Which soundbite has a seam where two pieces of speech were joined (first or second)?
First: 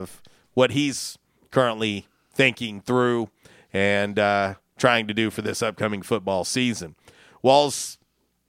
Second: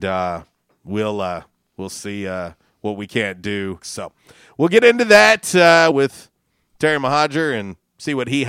second